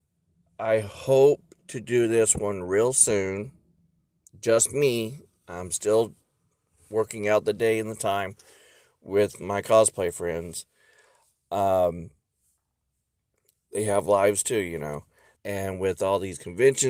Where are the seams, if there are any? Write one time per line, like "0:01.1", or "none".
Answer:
0:15.4